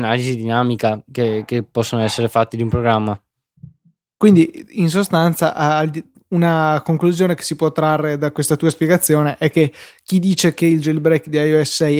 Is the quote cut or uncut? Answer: uncut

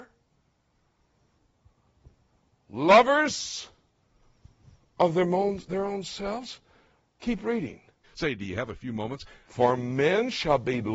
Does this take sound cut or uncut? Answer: cut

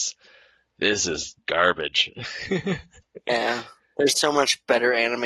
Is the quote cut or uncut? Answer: uncut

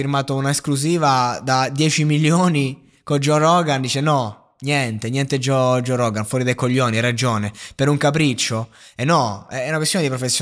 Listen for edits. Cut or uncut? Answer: uncut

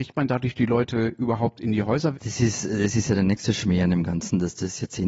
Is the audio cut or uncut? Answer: cut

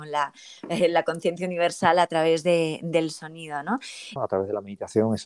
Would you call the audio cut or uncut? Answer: cut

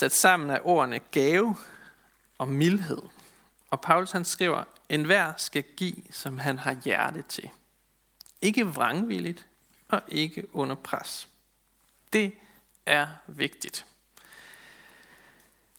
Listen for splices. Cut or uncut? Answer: uncut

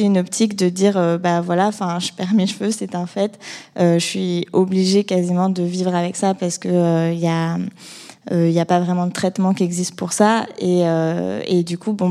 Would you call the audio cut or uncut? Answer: uncut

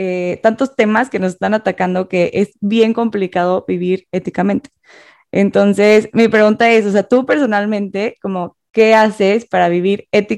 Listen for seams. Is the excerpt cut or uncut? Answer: uncut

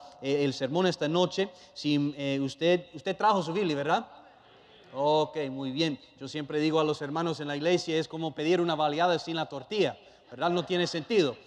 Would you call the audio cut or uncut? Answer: uncut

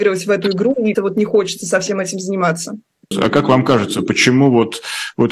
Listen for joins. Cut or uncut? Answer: cut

